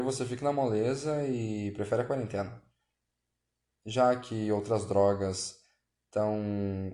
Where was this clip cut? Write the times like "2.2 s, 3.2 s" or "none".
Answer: 3.8 s